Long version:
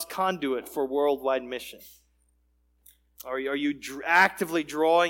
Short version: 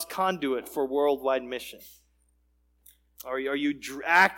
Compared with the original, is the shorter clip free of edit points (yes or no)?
yes